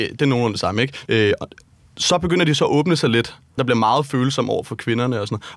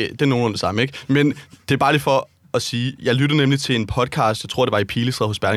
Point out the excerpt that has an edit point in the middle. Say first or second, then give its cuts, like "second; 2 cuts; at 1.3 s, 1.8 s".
first; 2 cuts; at 1.1 s, 3.6 s